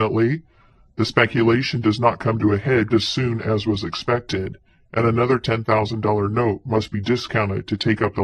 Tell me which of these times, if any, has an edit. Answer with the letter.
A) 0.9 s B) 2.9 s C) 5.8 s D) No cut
B